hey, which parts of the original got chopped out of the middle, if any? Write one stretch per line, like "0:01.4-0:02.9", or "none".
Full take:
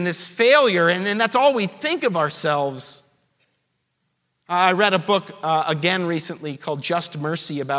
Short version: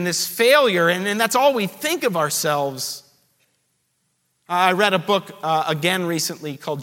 none

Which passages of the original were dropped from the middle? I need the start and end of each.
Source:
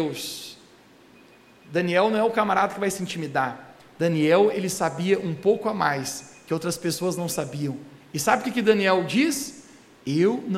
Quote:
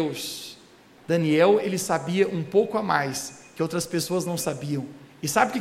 0:01.0-0:03.9

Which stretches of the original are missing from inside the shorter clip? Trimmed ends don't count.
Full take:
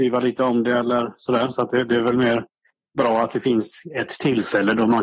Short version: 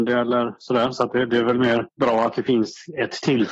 0:02.5-0:02.9

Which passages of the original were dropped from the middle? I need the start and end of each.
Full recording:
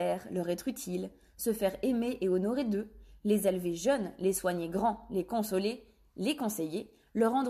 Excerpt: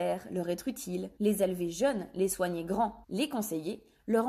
0:01.2-0:03.2
0:05.1-0:06.1

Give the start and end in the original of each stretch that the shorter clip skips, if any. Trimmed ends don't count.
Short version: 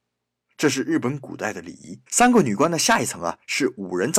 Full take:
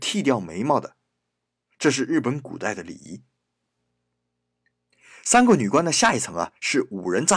0:03.3-0:05.2

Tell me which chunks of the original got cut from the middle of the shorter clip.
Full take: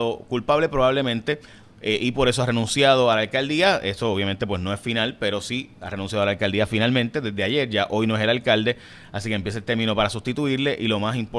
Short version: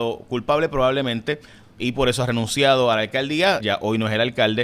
0:01.8-0:02.0
0:03.8-0:07.7

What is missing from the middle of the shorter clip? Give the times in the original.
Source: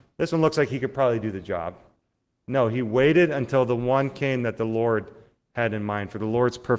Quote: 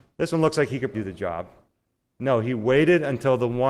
0:00.9-0:01.2

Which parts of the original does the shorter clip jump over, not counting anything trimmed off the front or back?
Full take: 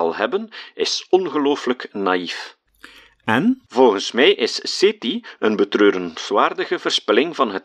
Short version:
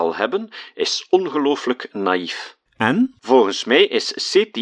0:02.7-0:03.1

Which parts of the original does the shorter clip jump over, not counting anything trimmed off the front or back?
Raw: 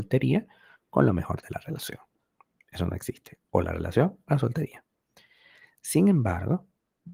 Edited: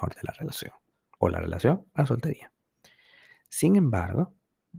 0:02.4-0:03.5

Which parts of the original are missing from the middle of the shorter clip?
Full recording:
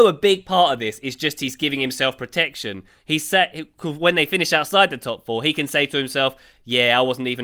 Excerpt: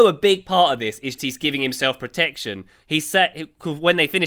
0:01.2-0:01.4

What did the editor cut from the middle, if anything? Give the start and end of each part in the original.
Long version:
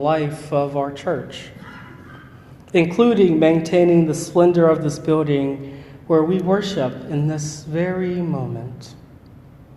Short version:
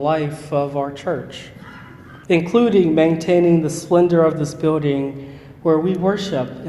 0:02.2-0:02.7

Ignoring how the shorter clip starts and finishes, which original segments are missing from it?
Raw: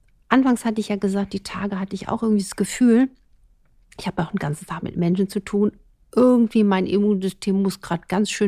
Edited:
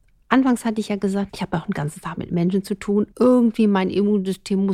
0:01.3-0:03.9
0:05.8-0:06.1

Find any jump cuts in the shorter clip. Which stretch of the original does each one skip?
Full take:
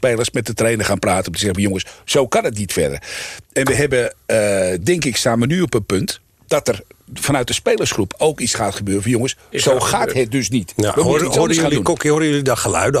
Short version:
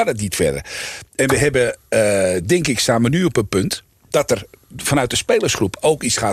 none

